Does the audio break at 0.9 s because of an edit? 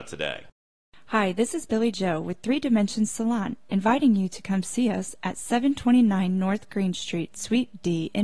no; 0 cuts

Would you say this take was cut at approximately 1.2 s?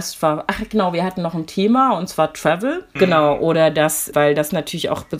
no; 2 cuts; at 3.0 s, 4.1 s

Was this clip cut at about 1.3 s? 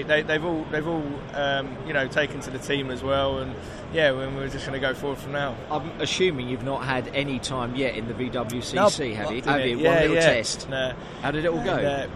no; 2 cuts; at 9.4 s, 10.7 s

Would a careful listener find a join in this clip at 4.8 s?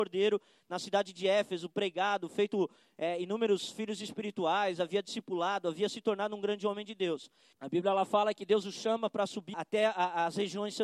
no; 2 cuts; at 7.5 s, 9.5 s

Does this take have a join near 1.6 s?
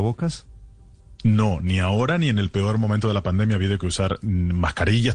no; 0 cuts

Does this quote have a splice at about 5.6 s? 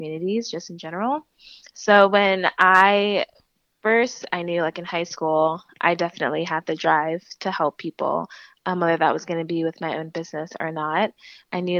no; 0 cuts

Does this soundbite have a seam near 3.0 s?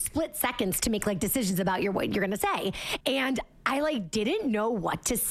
yes; 1 cut; at 3.0 s

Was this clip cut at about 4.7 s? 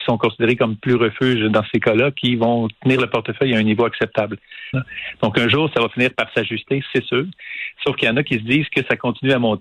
yes; 1 cut; at 4.7 s

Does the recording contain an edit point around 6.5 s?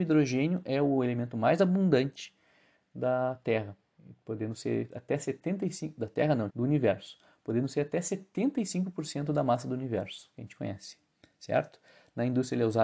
yes; 1 cut; at 6.5 s

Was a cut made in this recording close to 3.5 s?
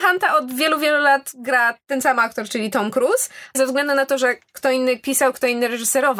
yes; 1 cut; at 3.5 s

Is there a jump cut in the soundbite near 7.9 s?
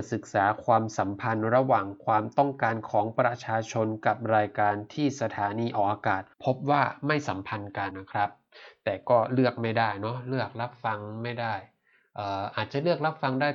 yes; 2 cuts; at 6.3 s, 7.9 s

